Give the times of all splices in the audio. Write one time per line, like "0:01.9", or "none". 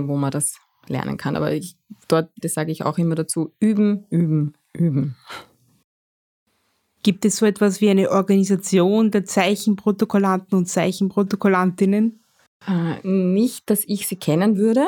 0:02.4